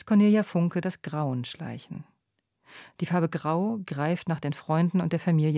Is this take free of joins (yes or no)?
yes